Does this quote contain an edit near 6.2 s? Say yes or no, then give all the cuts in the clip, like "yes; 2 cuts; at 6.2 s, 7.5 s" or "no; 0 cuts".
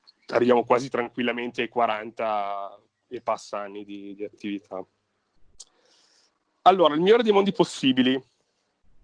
no; 0 cuts